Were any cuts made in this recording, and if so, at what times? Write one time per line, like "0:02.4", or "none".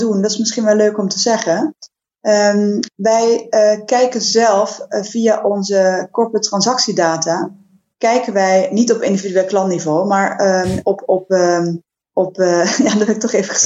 none